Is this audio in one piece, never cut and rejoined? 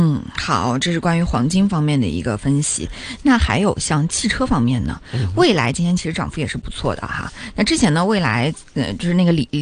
yes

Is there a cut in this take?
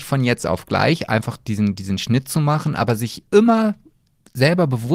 no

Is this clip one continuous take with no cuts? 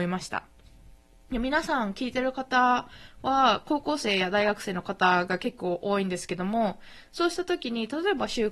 yes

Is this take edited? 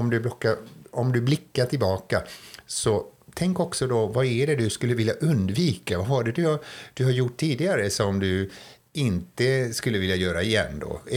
no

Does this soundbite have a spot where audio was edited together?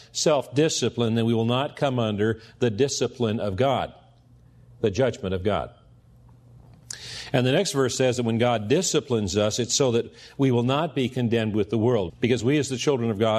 yes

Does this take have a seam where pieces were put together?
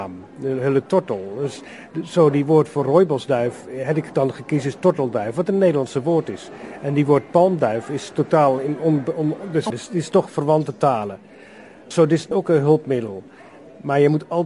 yes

